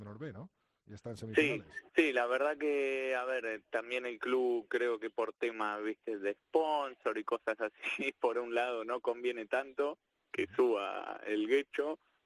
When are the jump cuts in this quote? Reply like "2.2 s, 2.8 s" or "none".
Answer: 1.9 s